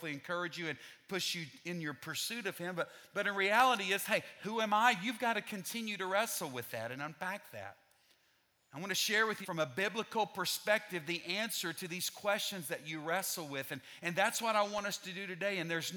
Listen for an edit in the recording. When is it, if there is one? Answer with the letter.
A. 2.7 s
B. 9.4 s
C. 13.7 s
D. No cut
B